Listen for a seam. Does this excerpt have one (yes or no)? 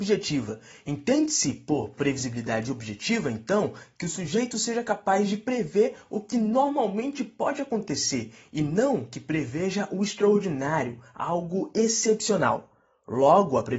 no